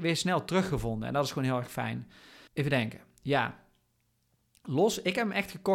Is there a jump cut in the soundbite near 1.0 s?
no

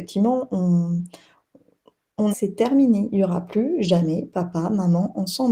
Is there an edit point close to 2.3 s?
yes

